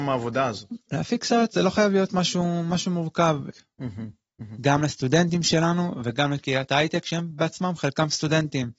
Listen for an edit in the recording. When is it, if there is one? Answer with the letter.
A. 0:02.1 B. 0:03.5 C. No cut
B